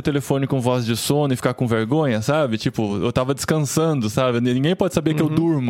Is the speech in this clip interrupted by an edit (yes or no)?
no